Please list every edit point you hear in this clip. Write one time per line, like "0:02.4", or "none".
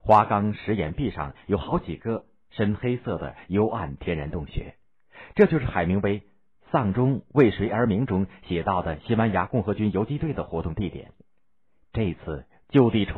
none